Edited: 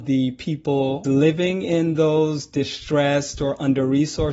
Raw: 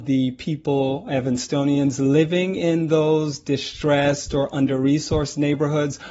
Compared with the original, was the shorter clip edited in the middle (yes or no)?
yes